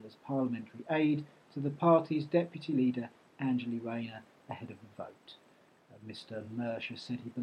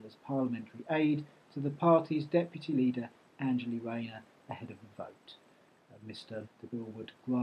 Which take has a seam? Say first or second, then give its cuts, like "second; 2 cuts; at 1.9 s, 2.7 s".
second; 1 cut; at 6.4 s